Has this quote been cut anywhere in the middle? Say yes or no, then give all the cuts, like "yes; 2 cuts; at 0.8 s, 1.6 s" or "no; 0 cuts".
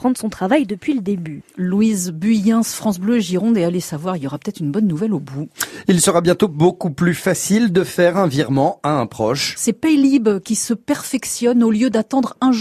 no; 0 cuts